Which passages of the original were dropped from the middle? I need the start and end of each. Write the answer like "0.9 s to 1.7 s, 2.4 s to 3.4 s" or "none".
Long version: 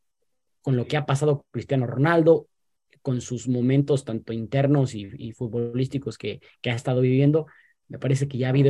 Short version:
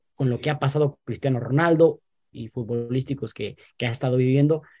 2.8 s to 5.2 s